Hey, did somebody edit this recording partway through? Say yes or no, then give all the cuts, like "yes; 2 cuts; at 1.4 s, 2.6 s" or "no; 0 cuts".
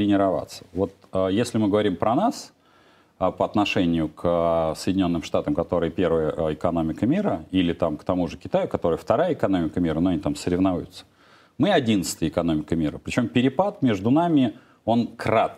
no; 0 cuts